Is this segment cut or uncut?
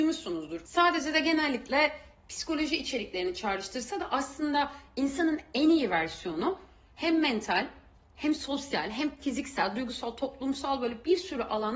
uncut